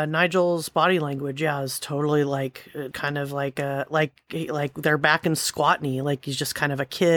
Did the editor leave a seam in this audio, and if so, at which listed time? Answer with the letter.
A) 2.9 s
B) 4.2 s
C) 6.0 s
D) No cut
A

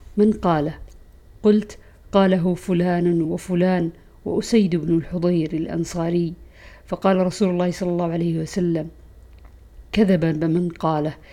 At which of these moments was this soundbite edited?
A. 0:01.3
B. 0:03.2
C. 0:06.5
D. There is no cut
B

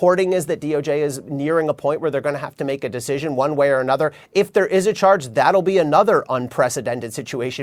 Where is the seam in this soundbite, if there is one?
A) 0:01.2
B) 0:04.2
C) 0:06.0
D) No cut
D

